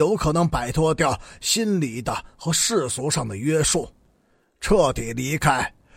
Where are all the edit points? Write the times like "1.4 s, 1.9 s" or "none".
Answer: none